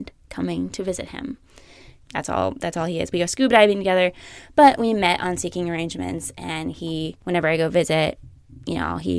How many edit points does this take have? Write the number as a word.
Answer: one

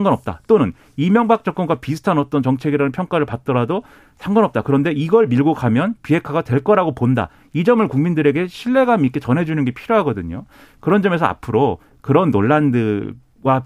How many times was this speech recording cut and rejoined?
zero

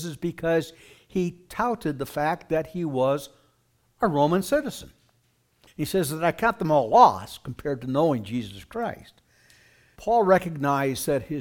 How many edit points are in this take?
two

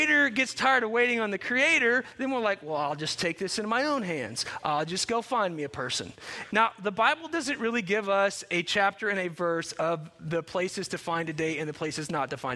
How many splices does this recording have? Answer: one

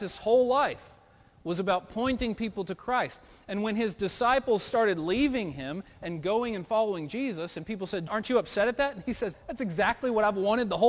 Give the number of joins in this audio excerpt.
two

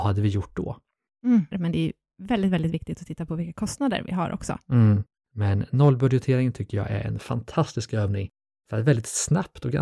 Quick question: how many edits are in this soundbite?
two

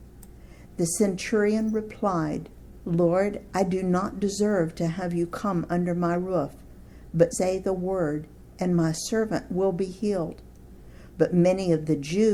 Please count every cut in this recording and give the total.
two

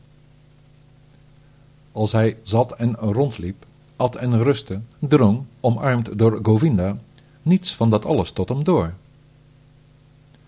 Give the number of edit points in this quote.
one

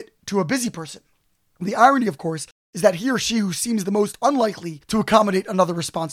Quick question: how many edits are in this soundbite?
zero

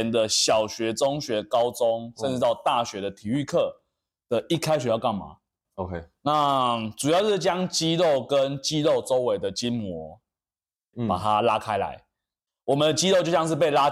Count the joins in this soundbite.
two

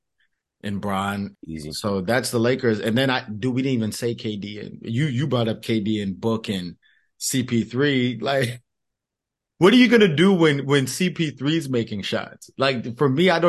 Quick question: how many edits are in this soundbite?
one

